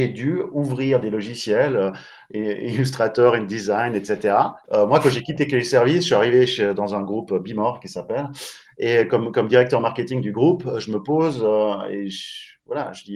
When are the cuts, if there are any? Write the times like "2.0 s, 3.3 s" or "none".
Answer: 4.6 s